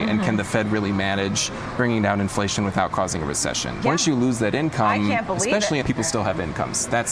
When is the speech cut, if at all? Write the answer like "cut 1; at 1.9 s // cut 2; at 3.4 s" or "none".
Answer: cut 1; at 3.8 s // cut 2; at 5.8 s